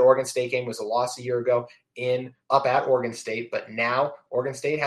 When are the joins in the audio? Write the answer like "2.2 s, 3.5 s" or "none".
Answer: 2.4 s